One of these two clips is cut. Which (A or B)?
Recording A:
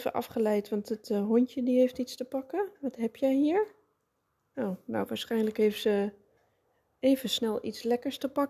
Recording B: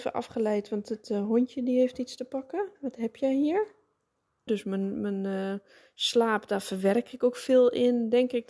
B